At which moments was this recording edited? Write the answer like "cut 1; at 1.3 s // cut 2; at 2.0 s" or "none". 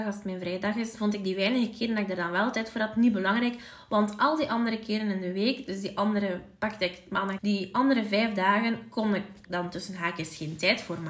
cut 1; at 7.4 s // cut 2; at 9.4 s